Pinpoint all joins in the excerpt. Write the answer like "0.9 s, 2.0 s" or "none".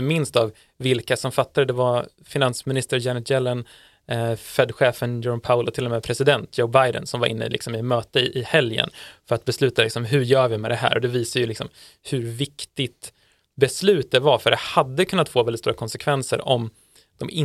none